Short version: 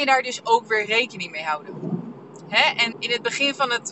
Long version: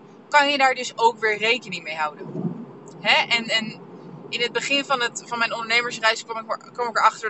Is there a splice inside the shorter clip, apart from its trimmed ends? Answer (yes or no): yes